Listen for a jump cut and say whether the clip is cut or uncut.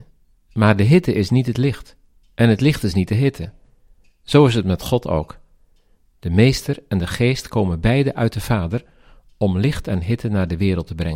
uncut